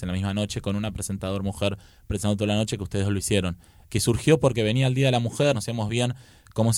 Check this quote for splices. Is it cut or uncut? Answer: cut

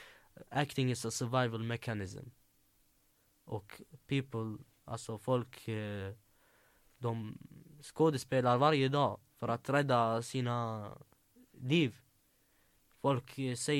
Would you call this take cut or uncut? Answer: uncut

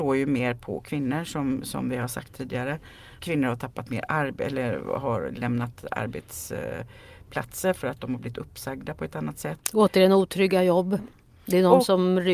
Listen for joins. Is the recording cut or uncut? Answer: cut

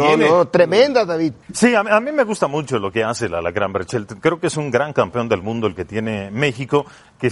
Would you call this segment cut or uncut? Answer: cut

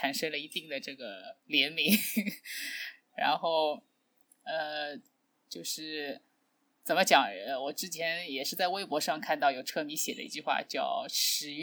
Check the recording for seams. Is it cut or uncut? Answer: uncut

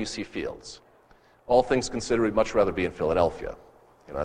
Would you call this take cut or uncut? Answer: uncut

